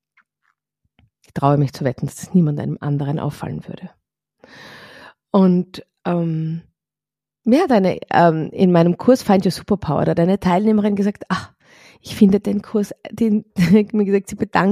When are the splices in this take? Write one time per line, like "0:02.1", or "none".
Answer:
none